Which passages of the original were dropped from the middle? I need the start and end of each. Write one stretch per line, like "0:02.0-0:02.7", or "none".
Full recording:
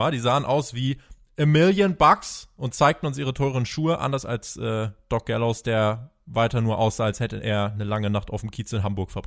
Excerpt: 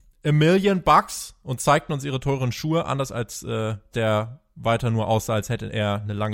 0:05.0-0:05.6